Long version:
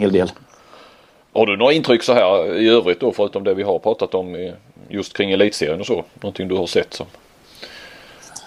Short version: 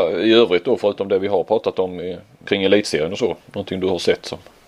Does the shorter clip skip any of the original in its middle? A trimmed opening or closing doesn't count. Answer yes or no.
yes